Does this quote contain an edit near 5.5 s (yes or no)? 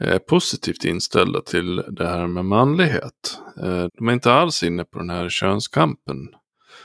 no